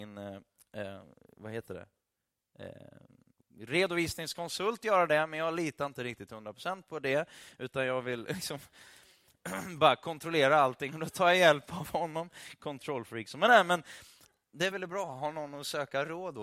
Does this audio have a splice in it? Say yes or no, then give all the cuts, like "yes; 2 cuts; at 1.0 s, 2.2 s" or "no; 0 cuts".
yes; 1 cut; at 14.7 s